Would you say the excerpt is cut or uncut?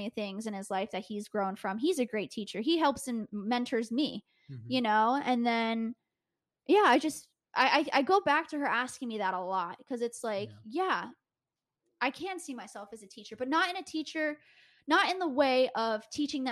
uncut